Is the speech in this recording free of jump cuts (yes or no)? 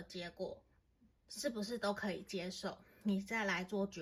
yes